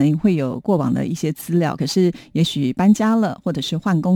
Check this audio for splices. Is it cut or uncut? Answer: uncut